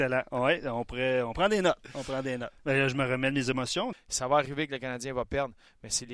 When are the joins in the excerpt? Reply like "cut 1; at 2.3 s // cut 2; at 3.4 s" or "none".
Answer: cut 1; at 2.6 s // cut 2; at 3.9 s